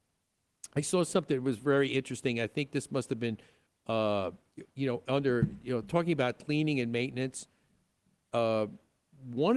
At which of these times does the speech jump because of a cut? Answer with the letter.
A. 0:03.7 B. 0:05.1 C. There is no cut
C